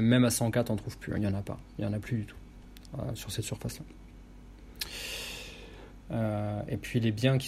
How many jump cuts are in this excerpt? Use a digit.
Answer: 1